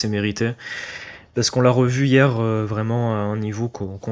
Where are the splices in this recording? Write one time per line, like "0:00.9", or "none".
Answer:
none